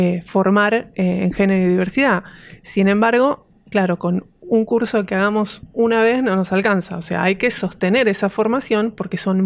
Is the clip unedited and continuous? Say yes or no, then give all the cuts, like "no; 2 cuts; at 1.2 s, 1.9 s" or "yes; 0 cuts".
yes; 0 cuts